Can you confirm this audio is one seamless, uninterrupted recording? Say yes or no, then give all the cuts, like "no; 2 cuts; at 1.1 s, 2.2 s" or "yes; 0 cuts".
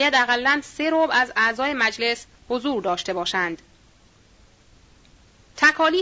yes; 0 cuts